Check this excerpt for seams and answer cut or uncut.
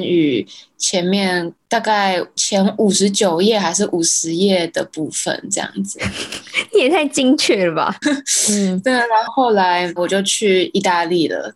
cut